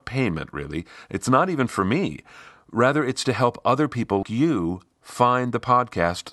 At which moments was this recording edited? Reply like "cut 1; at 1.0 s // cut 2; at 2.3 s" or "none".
cut 1; at 4.2 s